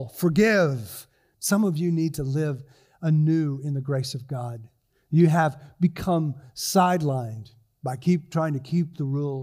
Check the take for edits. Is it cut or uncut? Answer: cut